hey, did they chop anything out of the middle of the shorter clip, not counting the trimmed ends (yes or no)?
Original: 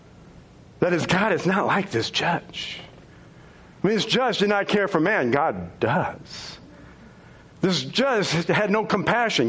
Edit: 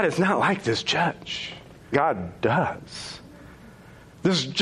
yes